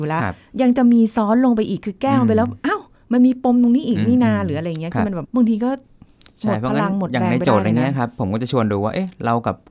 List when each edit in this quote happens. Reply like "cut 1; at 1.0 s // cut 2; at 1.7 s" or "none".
cut 1; at 5.2 s